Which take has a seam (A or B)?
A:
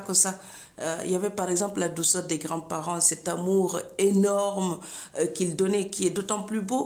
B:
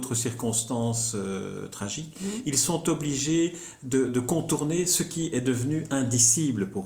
B